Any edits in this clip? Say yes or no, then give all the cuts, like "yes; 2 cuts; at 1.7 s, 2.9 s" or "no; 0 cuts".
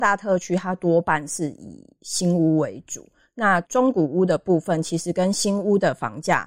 yes; 1 cut; at 3.6 s